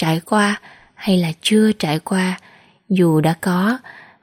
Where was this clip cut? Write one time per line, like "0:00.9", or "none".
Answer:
none